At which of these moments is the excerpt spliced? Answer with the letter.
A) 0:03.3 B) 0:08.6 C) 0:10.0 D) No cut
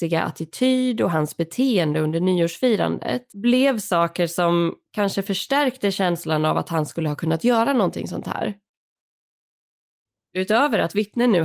A